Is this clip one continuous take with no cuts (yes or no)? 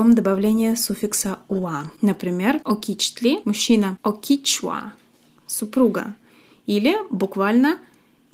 yes